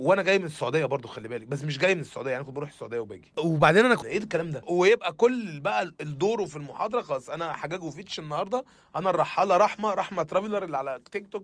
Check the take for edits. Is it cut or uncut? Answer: cut